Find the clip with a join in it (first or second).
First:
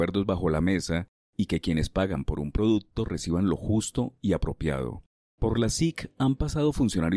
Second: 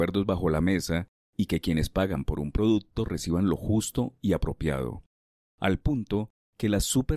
first